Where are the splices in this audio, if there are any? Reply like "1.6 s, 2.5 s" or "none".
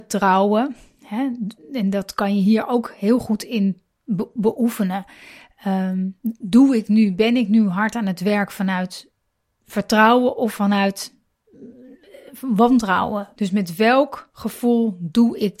13.3 s